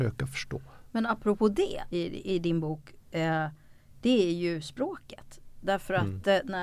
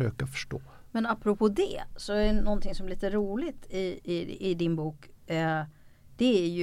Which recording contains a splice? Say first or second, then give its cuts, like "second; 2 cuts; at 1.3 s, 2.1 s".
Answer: first; 1 cut; at 1.9 s